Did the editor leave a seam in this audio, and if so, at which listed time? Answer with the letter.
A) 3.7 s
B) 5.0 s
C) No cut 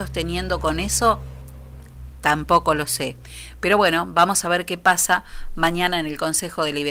C